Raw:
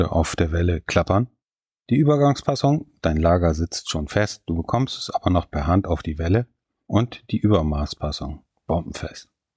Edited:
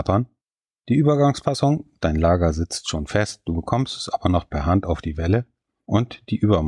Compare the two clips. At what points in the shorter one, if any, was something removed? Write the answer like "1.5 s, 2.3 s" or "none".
none